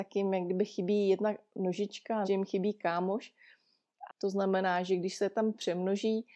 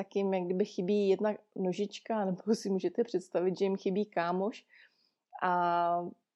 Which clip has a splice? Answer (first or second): first